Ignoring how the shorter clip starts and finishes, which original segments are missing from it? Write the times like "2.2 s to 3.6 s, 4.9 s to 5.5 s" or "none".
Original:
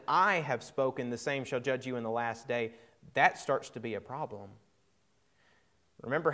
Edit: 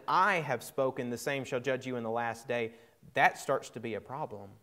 none